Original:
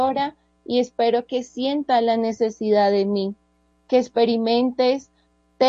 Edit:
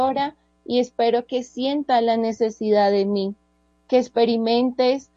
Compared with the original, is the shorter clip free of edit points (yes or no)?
yes